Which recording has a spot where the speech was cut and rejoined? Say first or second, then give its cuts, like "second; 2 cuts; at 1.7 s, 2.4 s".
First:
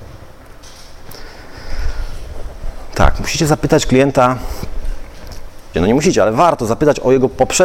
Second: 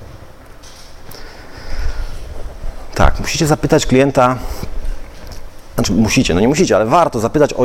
first; 1 cut; at 5.7 s